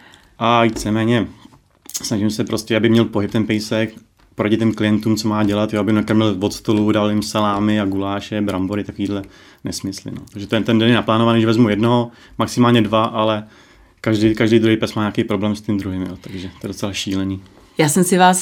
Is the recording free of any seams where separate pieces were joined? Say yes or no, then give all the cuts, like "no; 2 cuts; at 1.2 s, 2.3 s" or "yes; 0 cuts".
no; 1 cut; at 10.3 s